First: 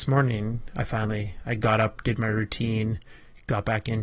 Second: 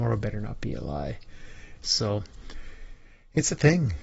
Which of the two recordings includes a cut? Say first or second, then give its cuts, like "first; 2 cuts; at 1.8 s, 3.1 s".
second; 1 cut; at 1.8 s